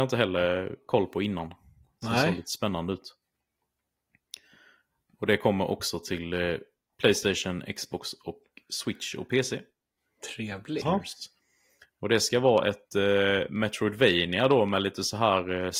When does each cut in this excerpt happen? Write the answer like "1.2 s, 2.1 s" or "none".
10.8 s